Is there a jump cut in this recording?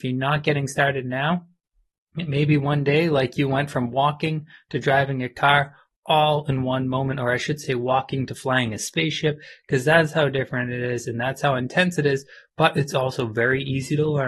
no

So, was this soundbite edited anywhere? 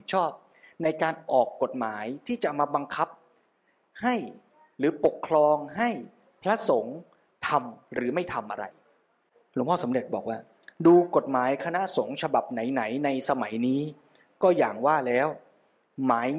no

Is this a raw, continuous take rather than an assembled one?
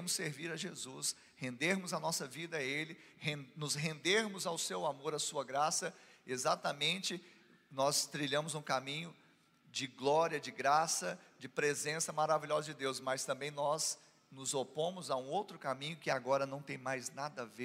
yes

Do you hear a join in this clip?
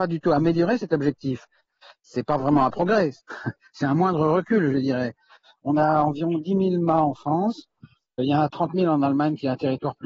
no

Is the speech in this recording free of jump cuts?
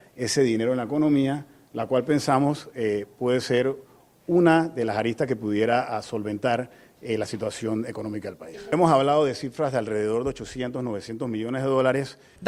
yes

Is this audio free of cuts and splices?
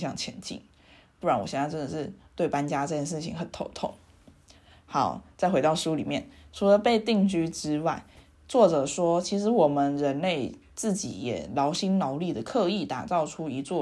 yes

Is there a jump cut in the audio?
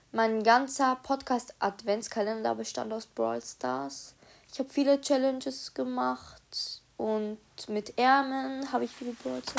no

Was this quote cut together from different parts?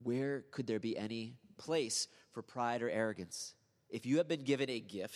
no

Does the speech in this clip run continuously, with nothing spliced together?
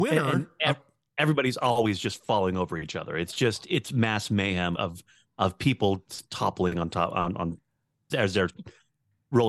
no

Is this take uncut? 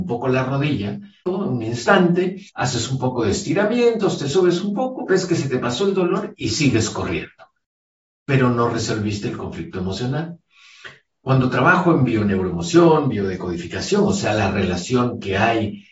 no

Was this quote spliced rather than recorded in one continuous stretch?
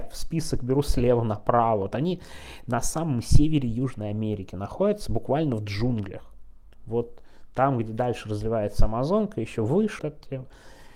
yes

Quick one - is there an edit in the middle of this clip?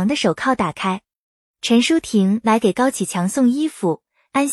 no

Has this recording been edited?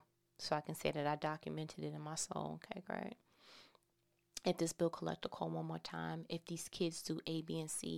no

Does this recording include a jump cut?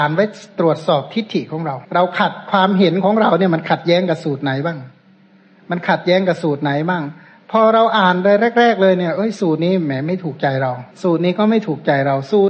yes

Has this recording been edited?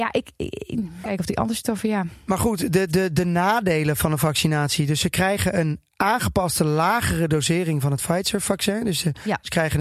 yes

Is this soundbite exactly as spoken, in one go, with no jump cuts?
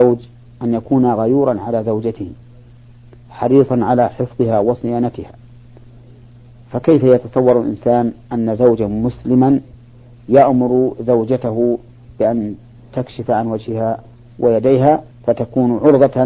no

